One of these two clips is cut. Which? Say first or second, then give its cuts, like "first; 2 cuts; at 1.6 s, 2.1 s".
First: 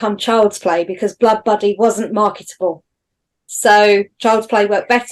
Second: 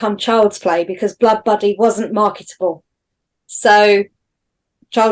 first; 1 cut; at 4.1 s